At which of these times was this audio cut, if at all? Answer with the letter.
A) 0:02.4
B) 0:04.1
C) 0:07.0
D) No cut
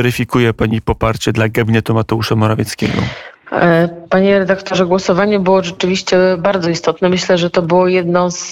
D